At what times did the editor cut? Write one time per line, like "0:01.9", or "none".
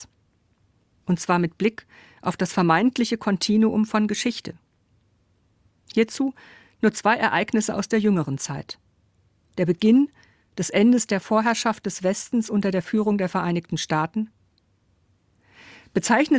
0:01.0
0:09.4